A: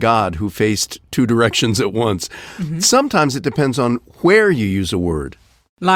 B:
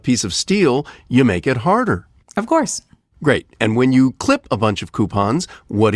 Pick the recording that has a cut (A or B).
B